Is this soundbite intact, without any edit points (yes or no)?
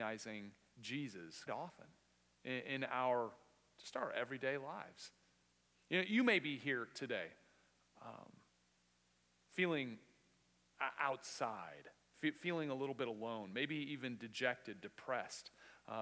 no